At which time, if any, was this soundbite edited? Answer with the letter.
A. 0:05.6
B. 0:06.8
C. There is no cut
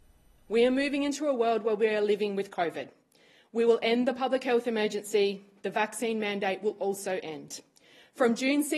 C